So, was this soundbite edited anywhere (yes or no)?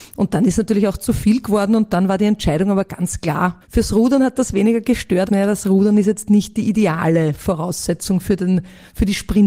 yes